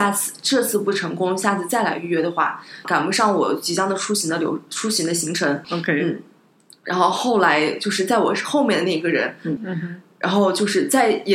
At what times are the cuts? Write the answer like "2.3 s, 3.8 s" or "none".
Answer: 2.8 s, 5.6 s, 9.6 s